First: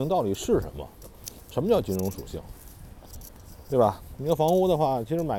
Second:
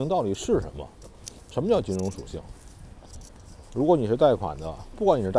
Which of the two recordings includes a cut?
second; 1 cut; at 3.6 s

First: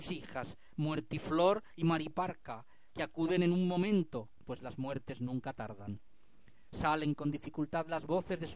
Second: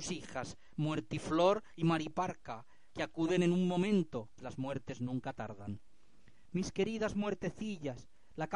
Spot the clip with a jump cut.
second; 2 cuts; at 4.4 s, 6.5 s

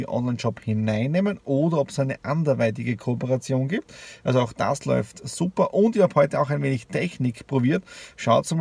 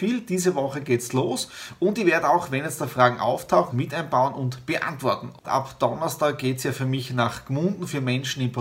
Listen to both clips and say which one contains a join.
second; 2 cuts; at 3.7 s, 5.4 s

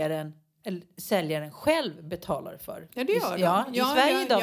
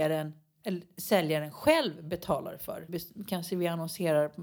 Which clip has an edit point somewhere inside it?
second; 1 cut; at 2.9 s

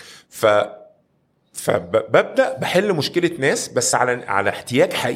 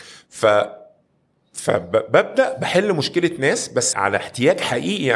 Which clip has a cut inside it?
second; 1 cut; at 3.9 s

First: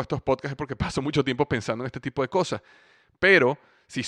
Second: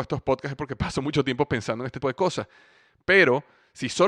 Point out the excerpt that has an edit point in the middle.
second; 1 cut; at 2.0 s

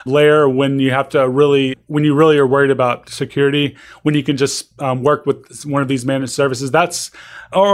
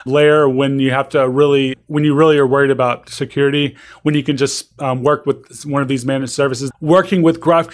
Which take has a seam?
second; 1 cut; at 6.7 s

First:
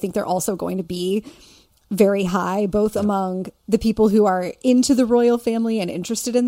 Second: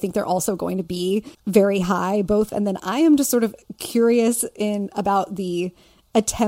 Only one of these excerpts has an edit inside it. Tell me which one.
second; 2 cuts; at 1.3 s, 2.5 s

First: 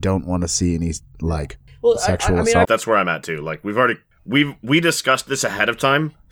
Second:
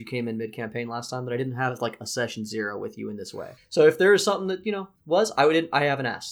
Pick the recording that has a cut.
first; 1 cut; at 2.6 s

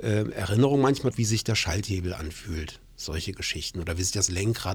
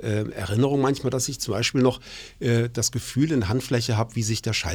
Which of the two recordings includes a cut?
first; 1 cut; at 1.1 s

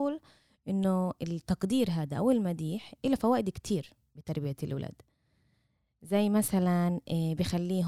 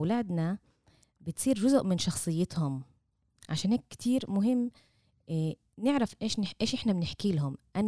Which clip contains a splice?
second; 1 cut; at 6.2 s

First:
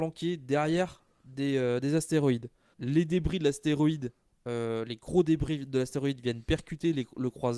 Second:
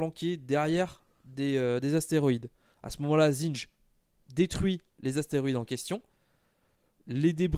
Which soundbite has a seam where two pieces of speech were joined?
first; 1 cut; at 2.7 s

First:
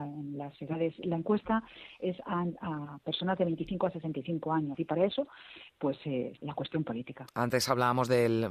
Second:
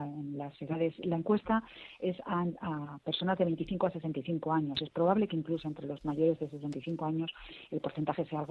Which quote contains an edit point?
first; 2 cuts; at 4.7 s, 6.4 s

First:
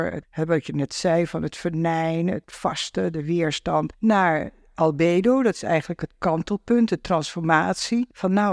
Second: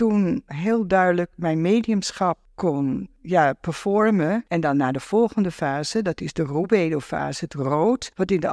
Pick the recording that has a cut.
second; 1 cut; at 4.5 s

